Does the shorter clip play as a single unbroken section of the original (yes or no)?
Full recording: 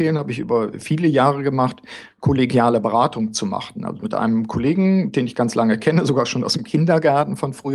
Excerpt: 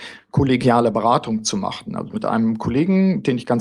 yes